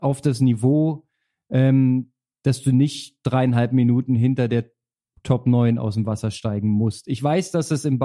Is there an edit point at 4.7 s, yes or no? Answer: no